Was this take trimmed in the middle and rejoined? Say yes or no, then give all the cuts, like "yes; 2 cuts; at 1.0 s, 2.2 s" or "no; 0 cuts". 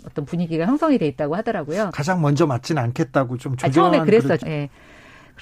yes; 2 cuts; at 1.9 s, 4.4 s